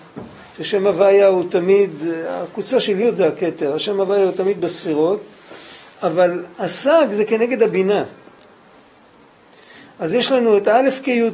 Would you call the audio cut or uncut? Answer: uncut